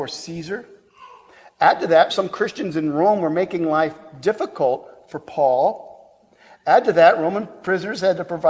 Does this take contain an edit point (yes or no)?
yes